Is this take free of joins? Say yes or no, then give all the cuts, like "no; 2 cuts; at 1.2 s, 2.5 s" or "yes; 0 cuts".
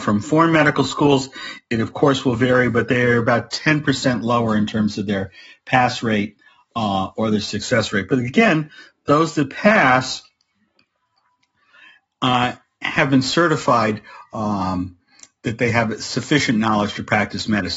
yes; 0 cuts